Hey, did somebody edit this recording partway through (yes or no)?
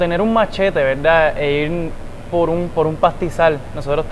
no